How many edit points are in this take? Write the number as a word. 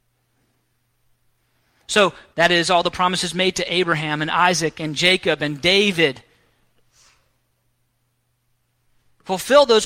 one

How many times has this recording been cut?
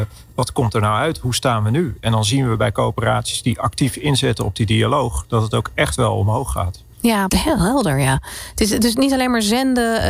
one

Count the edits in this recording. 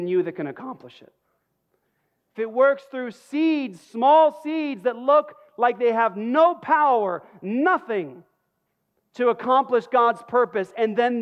one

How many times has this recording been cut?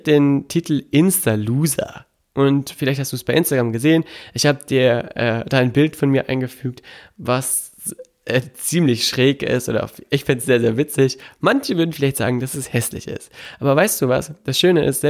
zero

